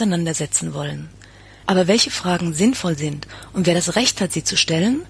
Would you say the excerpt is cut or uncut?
cut